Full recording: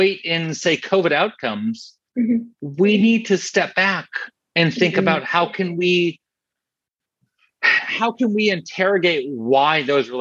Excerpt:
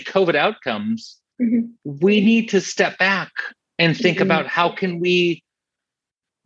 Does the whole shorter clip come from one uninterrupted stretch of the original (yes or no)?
yes